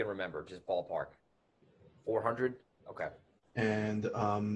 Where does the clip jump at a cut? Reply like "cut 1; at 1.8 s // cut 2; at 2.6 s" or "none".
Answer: cut 1; at 2.8 s